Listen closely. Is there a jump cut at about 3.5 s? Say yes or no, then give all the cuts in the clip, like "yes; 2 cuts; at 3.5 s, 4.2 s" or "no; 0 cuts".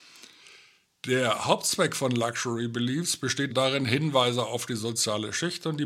yes; 1 cut; at 3.5 s